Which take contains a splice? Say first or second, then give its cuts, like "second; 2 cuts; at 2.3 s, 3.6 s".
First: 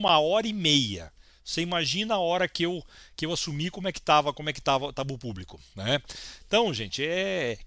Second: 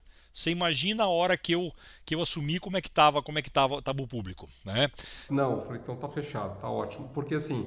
second; 1 cut; at 5.3 s